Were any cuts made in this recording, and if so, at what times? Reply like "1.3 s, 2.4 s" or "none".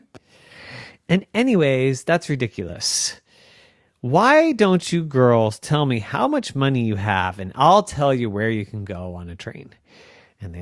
none